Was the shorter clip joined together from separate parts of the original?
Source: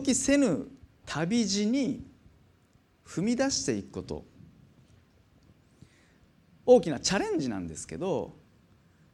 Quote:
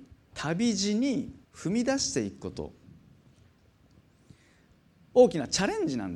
yes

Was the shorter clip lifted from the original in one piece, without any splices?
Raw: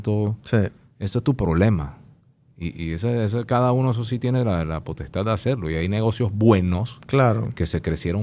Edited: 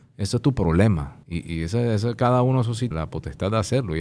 no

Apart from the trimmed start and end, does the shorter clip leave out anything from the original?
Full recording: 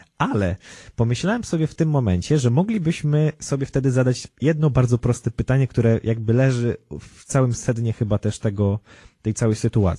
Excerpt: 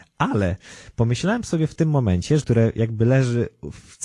yes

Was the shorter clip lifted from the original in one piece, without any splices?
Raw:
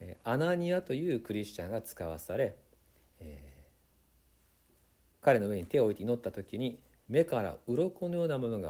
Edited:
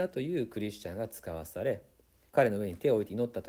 no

